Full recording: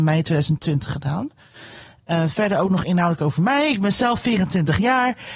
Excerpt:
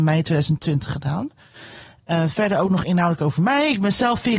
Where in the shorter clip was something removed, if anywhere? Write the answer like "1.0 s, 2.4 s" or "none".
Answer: none